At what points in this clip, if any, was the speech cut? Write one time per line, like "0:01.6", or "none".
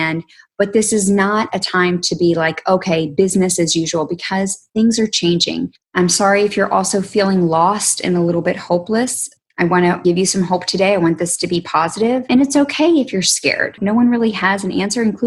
0:05.8